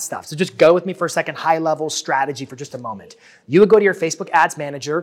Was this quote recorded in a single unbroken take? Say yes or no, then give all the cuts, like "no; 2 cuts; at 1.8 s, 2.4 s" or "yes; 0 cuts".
yes; 0 cuts